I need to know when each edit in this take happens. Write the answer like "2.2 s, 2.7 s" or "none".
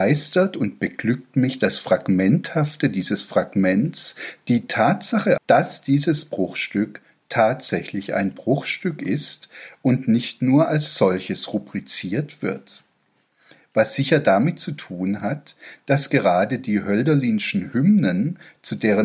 5.4 s